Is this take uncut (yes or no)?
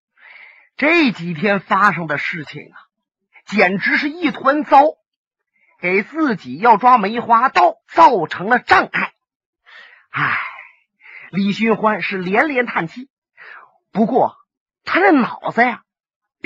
no